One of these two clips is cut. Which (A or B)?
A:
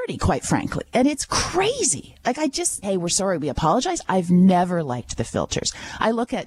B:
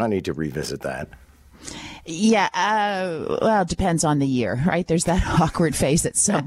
A